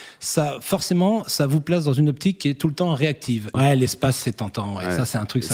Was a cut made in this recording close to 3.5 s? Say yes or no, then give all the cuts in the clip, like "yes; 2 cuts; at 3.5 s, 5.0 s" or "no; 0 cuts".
yes; 1 cut; at 3.5 s